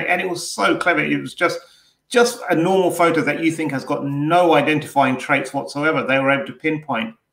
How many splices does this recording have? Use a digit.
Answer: 0